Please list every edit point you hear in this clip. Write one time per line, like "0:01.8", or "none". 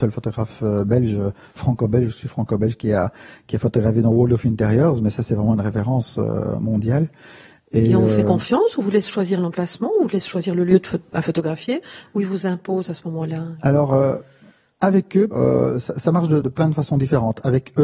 0:15.3
0:16.4